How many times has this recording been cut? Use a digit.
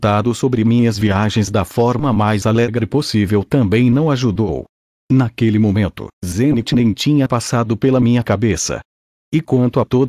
1